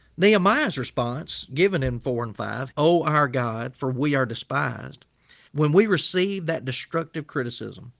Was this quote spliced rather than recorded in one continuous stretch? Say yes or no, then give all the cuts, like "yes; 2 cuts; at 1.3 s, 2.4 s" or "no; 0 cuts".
yes; 2 cuts; at 2.7 s, 5.5 s